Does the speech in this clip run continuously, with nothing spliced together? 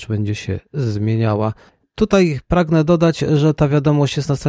yes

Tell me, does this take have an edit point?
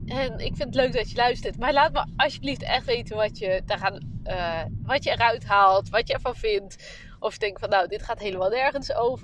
no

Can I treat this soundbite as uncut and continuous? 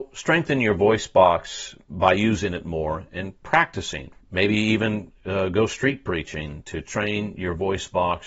no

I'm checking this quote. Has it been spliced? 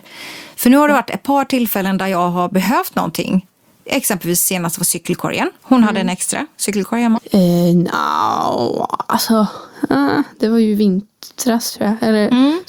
yes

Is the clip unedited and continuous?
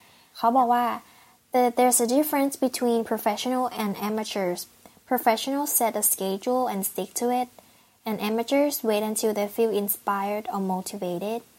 yes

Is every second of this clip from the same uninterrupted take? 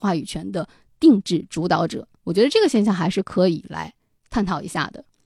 no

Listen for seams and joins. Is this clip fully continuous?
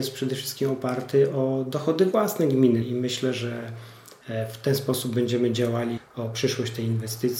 no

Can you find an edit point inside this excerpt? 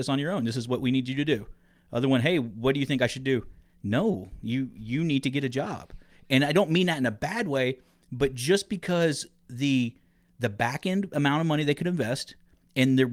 no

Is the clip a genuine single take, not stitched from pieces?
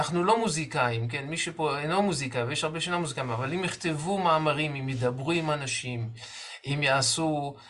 yes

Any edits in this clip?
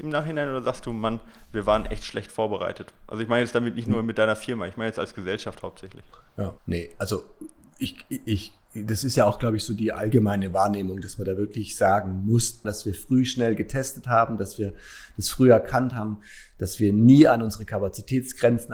yes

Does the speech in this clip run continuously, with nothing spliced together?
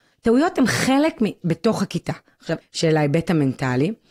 no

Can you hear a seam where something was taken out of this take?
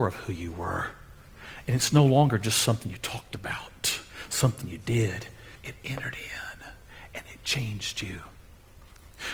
yes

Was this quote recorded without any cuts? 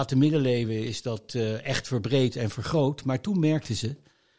yes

